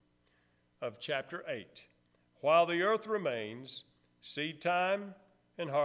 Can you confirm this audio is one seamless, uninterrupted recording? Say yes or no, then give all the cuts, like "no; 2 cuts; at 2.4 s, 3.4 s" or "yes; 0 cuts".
yes; 0 cuts